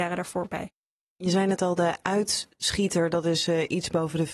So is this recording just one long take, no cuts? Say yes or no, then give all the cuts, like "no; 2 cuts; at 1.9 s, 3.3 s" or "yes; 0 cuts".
yes; 0 cuts